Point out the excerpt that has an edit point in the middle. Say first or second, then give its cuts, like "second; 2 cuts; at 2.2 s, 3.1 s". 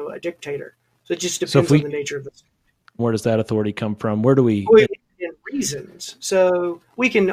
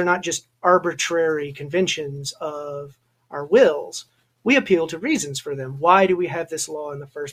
first; 2 cuts; at 3.0 s, 4.8 s